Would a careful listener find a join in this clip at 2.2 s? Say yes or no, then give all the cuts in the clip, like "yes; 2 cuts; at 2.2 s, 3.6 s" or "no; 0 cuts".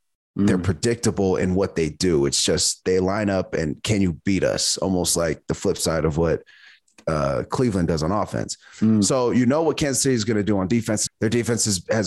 no; 1 cut; at 11.1 s